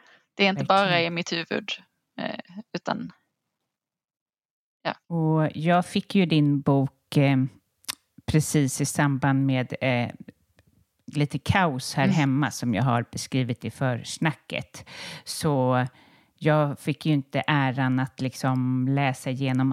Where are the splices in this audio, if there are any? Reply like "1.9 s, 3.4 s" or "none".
5.0 s